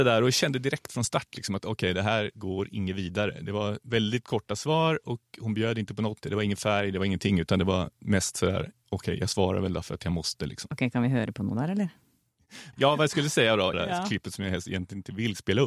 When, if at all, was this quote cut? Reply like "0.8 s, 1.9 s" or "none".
6.2 s, 12.7 s, 13.7 s